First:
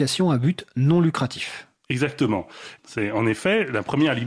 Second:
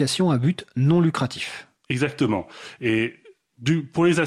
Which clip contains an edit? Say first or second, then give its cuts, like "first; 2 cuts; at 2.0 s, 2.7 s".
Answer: first; 1 cut; at 2.8 s